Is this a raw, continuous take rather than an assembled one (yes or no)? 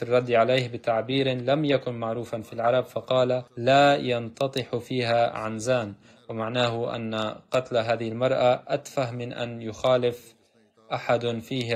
no